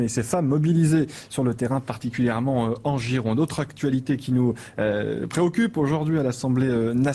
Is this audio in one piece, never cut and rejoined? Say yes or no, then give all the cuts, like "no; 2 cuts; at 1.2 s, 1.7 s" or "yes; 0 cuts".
yes; 0 cuts